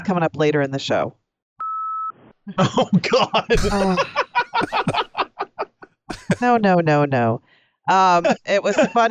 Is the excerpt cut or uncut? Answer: cut